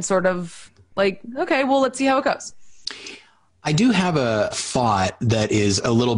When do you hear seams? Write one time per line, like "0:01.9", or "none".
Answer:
0:04.5